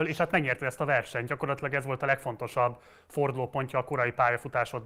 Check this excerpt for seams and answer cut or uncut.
uncut